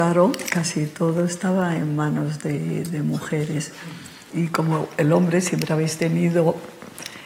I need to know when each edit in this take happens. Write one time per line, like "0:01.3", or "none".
0:04.3